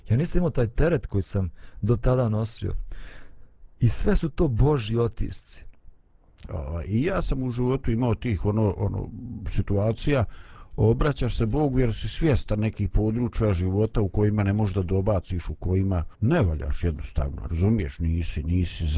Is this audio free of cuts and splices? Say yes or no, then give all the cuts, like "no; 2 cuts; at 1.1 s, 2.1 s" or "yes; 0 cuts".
no; 2 cuts; at 6.5 s, 16.2 s